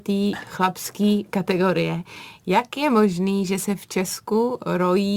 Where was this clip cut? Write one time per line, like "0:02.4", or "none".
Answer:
none